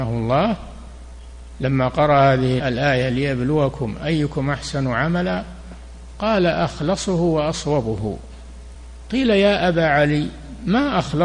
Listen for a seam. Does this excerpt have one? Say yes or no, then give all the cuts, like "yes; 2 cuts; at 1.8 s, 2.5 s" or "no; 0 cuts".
yes; 1 cut; at 2.6 s